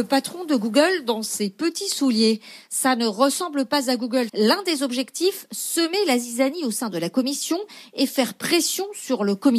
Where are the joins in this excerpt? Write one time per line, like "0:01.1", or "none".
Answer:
0:04.3